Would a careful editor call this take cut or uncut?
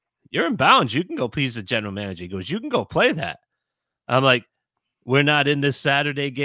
uncut